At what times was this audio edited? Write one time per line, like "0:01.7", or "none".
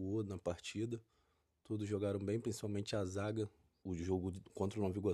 0:03.8